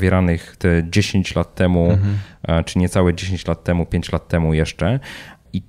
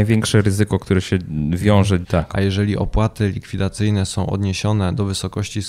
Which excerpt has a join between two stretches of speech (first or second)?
second